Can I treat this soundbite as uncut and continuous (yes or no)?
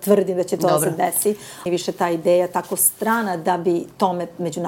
no